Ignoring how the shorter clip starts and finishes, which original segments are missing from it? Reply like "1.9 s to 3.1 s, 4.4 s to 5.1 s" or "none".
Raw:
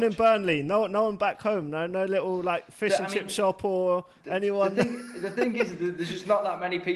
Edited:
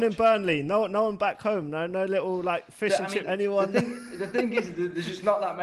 3.2 s to 4.3 s